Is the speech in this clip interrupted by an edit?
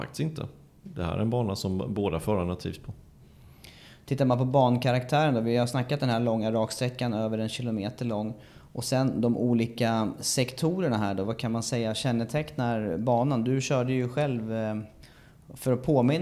no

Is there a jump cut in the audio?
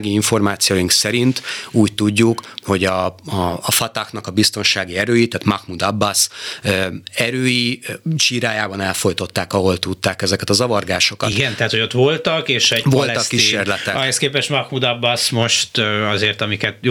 no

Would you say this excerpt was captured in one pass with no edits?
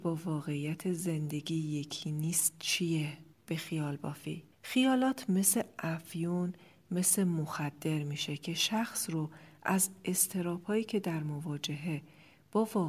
no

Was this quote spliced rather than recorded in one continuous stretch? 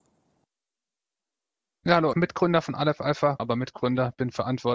yes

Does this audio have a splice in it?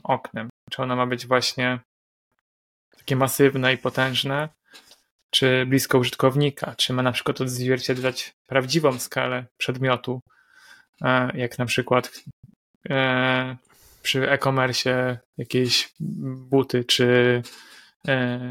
no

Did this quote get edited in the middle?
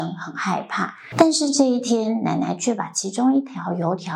no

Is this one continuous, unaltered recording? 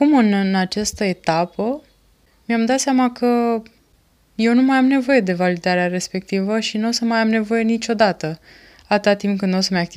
yes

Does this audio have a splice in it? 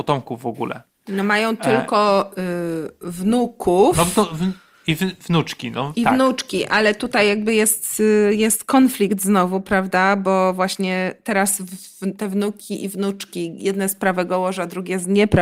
no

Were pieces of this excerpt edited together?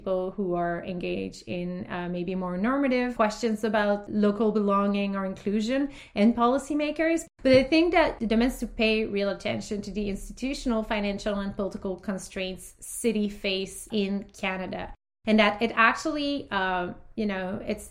yes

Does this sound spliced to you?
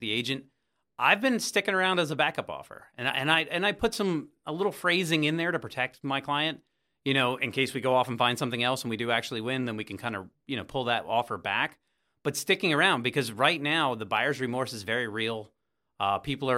no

